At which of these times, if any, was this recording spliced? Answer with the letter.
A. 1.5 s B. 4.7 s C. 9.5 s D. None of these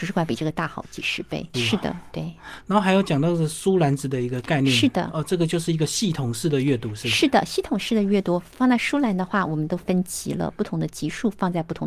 A